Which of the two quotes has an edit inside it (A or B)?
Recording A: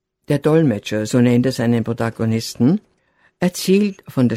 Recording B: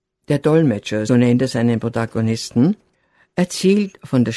B